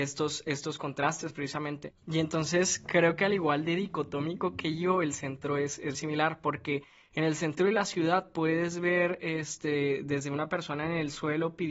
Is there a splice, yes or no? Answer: yes